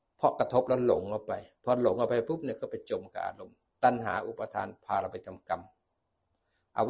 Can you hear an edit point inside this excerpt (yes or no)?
no